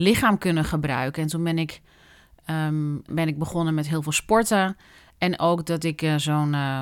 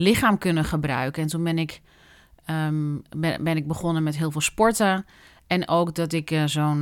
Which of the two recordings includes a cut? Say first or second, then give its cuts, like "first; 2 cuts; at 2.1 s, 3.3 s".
first; 1 cut; at 3.1 s